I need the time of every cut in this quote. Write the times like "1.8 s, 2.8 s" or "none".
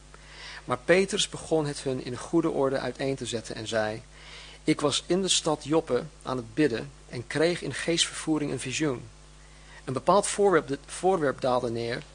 none